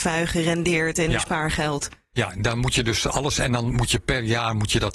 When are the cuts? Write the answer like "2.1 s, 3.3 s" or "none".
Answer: none

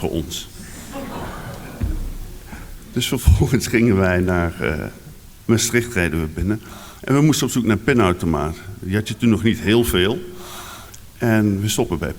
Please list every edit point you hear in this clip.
none

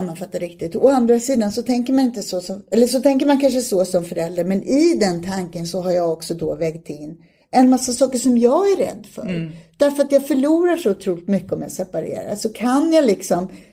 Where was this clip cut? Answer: none

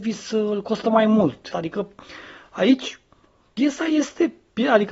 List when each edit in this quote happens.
1.5 s

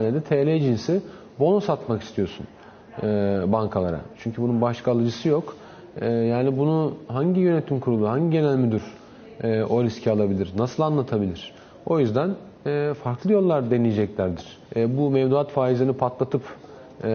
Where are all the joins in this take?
14.7 s

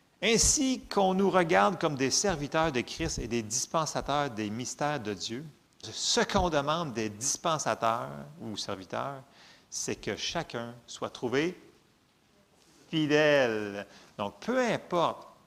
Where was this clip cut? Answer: 5.8 s

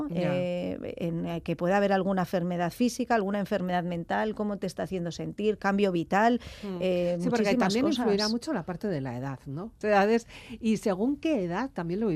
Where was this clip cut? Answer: 9.8 s

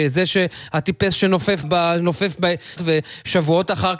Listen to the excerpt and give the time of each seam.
1.6 s, 2.8 s

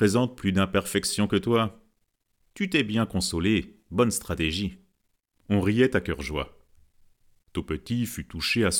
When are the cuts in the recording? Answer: 2.4 s

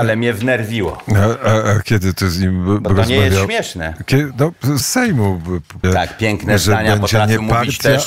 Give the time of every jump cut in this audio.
4.8 s, 5.8 s

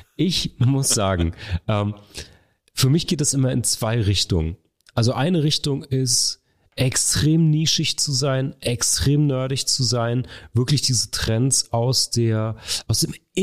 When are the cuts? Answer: none

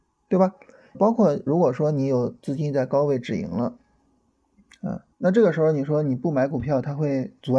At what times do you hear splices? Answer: 0.9 s, 5.1 s

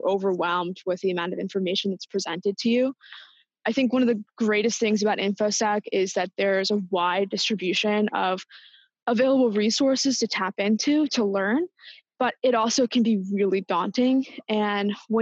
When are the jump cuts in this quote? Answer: none

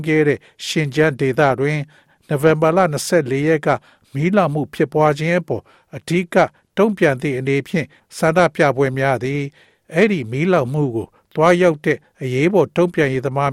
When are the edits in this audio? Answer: none

